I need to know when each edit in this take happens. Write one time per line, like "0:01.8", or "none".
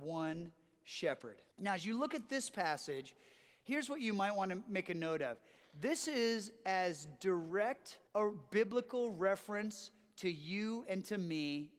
0:01.5
0:08.1